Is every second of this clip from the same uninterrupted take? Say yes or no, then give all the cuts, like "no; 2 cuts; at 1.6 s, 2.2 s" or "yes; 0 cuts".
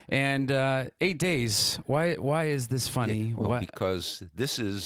yes; 0 cuts